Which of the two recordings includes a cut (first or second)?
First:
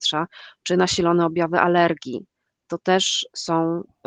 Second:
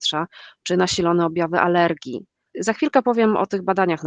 second